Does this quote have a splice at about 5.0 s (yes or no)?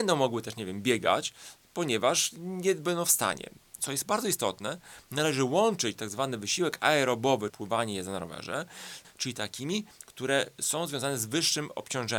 no